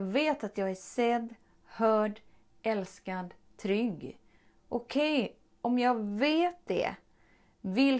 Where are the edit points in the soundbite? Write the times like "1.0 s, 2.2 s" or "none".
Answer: none